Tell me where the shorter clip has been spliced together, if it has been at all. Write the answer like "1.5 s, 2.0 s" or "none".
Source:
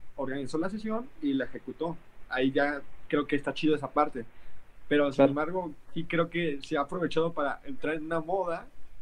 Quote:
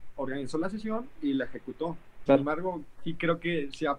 2.3 s